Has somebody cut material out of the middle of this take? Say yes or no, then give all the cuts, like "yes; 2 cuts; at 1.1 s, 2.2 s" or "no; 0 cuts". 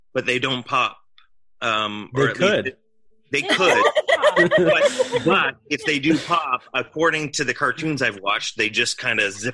no; 0 cuts